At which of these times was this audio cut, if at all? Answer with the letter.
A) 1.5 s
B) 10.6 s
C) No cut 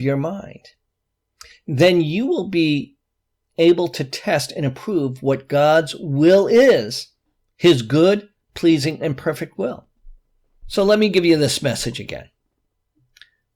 B